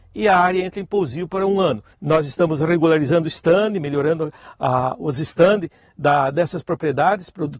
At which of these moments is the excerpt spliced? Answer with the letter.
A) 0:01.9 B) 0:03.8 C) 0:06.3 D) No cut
A